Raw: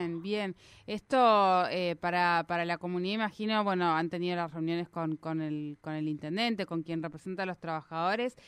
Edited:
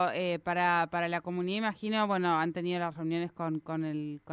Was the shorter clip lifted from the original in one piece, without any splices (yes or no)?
yes